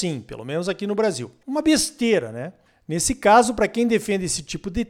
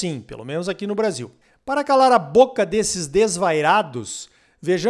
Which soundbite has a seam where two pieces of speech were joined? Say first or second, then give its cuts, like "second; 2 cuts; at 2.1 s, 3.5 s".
first; 1 cut; at 1.4 s